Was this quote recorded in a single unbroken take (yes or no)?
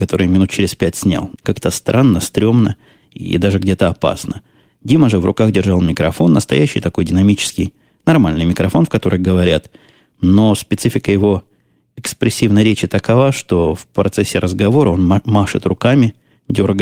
no